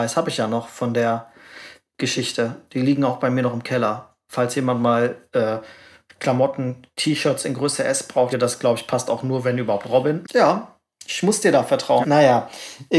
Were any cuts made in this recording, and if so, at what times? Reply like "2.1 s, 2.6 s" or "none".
8.3 s, 10.2 s, 12.0 s